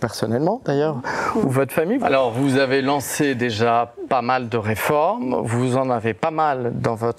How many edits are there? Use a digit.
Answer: 1